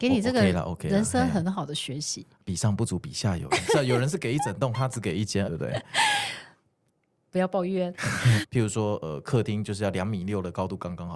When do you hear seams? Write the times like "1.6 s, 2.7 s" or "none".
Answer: 5.4 s, 8.4 s